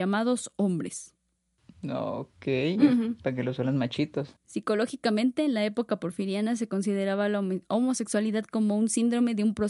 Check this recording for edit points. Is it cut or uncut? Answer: cut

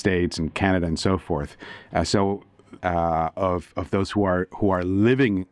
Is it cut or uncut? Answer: cut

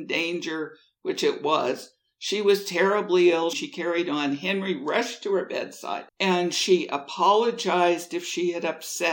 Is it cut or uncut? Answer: cut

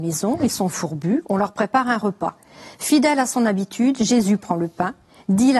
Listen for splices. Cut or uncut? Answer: uncut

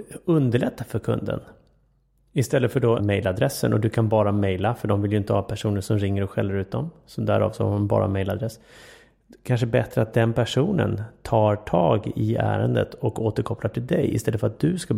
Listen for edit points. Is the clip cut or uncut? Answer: cut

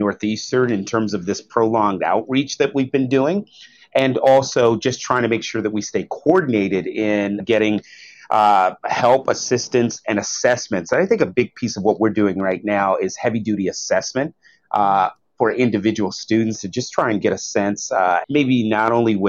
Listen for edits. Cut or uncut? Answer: cut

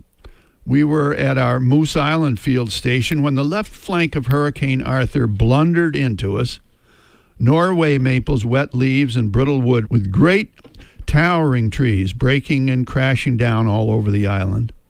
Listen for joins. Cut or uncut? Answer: cut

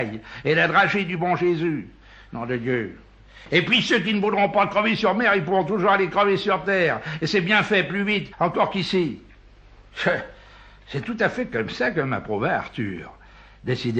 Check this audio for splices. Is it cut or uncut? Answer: uncut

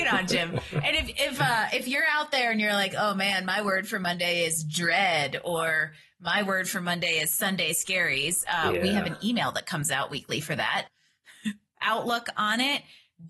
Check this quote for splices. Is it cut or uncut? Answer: cut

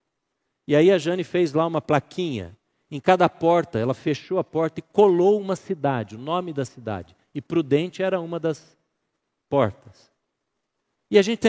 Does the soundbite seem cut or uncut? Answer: uncut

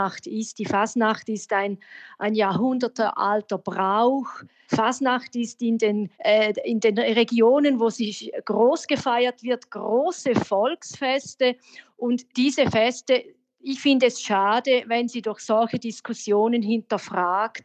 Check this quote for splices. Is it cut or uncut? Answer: cut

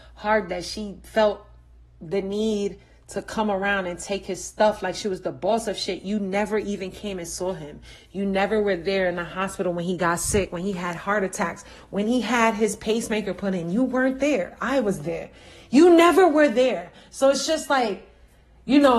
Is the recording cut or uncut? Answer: uncut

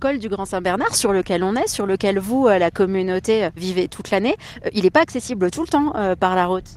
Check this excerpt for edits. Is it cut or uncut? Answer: uncut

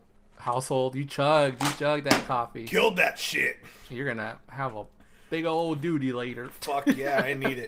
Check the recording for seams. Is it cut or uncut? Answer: uncut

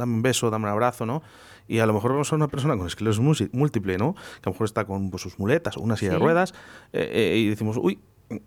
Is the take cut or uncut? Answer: uncut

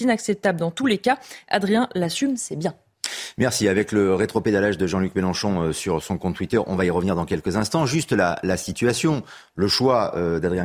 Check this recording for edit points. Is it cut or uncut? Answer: uncut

